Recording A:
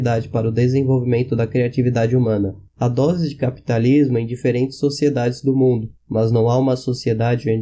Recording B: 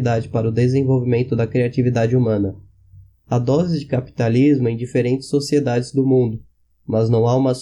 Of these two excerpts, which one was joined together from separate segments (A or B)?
A